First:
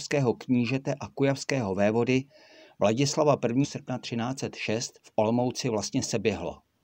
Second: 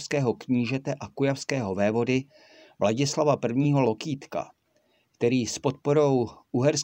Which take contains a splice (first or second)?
first